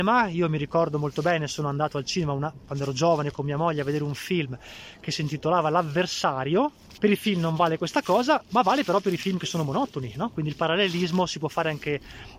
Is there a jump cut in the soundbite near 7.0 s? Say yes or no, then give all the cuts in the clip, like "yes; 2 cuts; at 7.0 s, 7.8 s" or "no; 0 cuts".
yes; 1 cut; at 7.0 s